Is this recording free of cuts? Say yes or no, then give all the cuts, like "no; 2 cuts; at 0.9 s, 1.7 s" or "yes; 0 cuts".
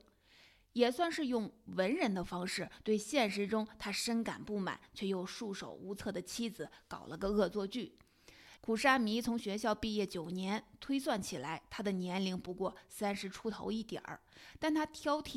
no; 1 cut; at 8.6 s